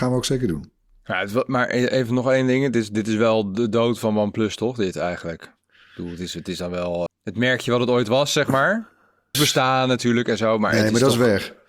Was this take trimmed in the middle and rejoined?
yes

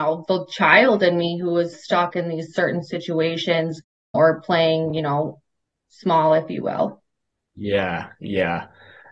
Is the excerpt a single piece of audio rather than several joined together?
yes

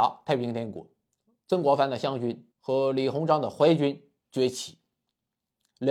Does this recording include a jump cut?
yes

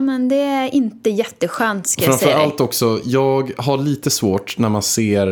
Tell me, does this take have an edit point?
no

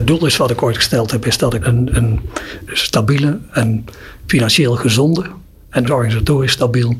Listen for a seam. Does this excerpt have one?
yes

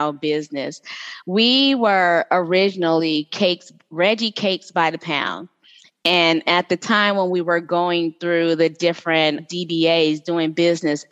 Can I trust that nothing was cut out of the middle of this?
yes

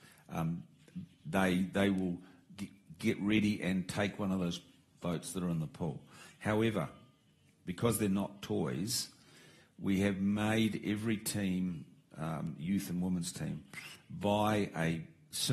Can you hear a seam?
no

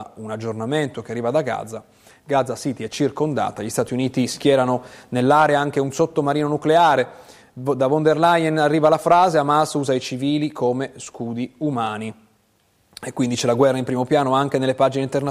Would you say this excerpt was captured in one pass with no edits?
yes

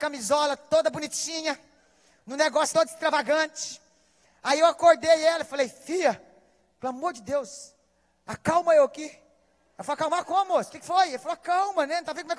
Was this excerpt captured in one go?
no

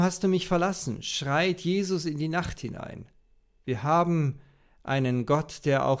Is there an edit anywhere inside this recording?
yes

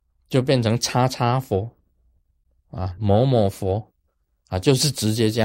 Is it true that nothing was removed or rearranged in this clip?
yes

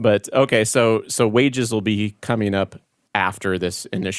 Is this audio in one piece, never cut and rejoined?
yes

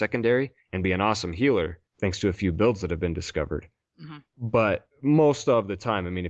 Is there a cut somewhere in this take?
no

